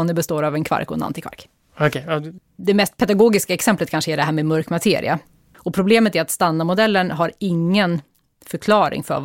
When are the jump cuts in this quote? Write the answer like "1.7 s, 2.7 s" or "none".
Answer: 2.4 s, 5.5 s